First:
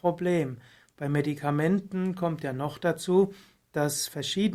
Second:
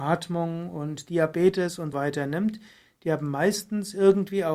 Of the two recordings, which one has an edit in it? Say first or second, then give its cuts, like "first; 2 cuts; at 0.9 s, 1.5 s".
second; 1 cut; at 1.9 s